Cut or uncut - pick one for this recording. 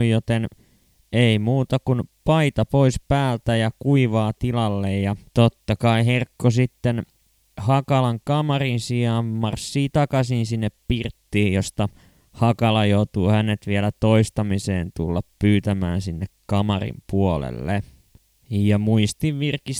cut